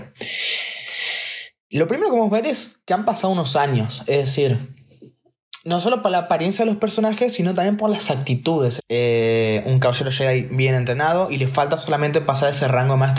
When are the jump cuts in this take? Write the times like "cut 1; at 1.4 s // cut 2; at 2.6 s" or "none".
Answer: cut 1; at 8.8 s